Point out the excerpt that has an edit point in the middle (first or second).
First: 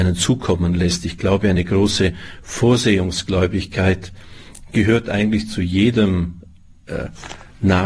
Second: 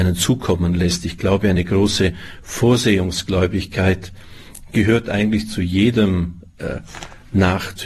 second